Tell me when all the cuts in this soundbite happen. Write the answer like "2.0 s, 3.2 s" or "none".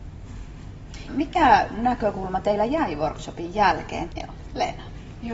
1.1 s, 4.1 s